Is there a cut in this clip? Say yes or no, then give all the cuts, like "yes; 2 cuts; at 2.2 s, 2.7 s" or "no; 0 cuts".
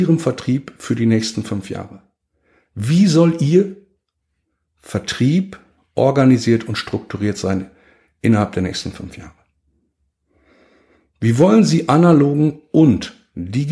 no; 0 cuts